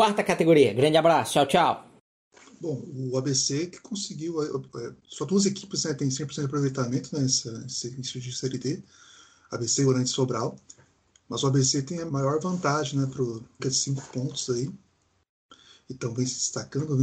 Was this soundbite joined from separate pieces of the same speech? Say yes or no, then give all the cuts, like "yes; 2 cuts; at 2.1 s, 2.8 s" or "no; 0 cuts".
yes; 2 cuts; at 12.1 s, 13.6 s